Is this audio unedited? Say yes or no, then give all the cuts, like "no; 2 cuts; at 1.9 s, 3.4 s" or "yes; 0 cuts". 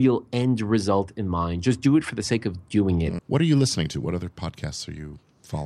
no; 1 cut; at 3.2 s